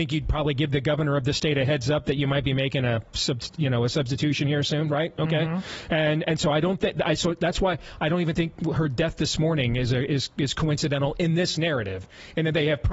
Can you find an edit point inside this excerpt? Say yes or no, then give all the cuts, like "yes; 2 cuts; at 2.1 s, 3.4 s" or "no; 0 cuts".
no; 0 cuts